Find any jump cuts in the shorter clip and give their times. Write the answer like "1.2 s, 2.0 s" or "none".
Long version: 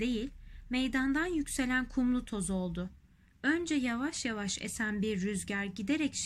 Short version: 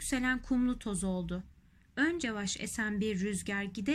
2.2 s